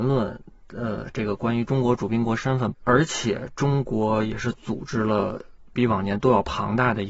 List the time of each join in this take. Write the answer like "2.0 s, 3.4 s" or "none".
2.7 s